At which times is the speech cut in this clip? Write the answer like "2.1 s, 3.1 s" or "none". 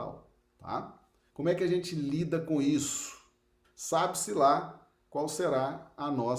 1.3 s, 3.6 s